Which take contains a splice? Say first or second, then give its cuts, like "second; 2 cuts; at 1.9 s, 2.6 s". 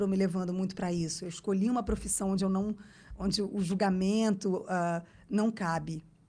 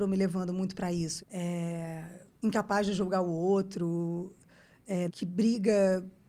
second; 3 cuts; at 1.2 s, 2.3 s, 5.1 s